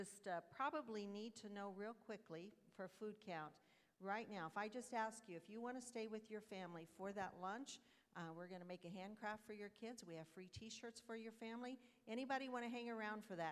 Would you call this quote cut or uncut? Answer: uncut